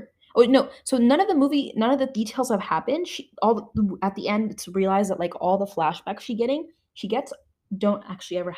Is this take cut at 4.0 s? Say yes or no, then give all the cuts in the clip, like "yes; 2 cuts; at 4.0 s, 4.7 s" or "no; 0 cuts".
no; 0 cuts